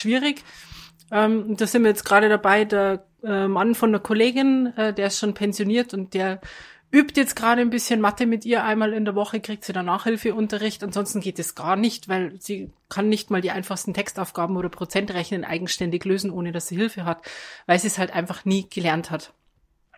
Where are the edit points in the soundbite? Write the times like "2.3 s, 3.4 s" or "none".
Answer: none